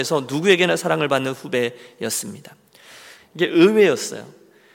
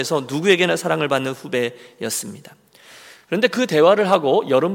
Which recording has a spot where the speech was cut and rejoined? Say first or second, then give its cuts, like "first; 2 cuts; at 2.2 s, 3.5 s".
first; 1 cut; at 3.2 s